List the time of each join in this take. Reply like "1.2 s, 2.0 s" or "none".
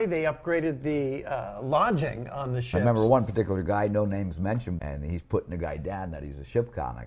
4.8 s